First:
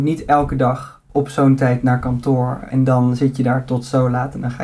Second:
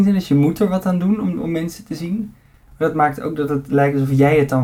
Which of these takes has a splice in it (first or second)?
first